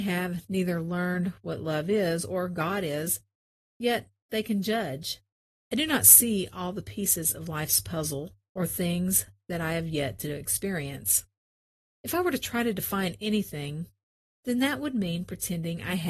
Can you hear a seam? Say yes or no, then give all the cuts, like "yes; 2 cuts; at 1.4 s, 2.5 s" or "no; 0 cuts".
yes; 1 cut; at 5.5 s